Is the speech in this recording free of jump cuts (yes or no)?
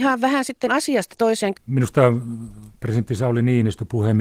no